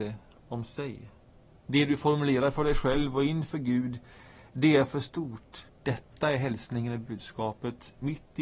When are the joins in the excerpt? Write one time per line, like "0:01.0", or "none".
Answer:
0:01.6
0:05.7